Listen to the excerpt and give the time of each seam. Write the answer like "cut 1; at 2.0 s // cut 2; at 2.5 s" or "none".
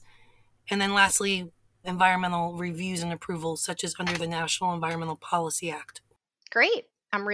none